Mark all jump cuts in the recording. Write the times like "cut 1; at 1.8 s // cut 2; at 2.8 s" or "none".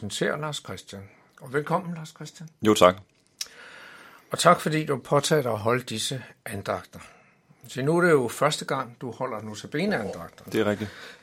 none